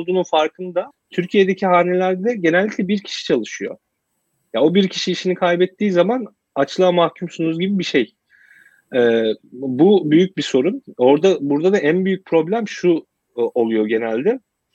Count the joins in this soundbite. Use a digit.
1